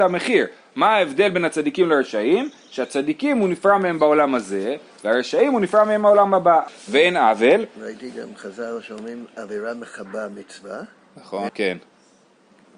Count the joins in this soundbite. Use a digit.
2